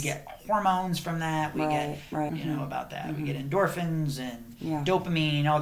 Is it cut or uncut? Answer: cut